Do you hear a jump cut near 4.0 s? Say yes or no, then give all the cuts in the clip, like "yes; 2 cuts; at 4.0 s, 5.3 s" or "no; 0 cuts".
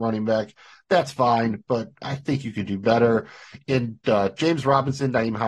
no; 0 cuts